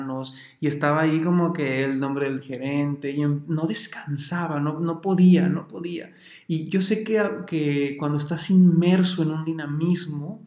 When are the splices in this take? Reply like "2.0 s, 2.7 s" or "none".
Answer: none